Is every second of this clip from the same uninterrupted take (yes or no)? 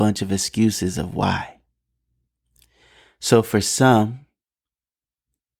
yes